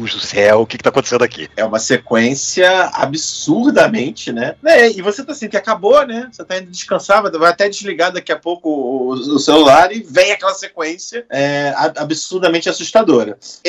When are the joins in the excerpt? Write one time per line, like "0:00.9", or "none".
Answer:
0:05.5